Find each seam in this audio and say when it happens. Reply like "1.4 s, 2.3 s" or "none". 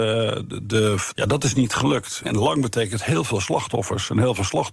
1.1 s, 2.2 s